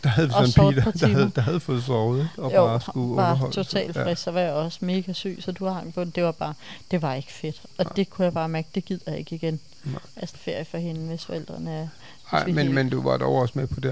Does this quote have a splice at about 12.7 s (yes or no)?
no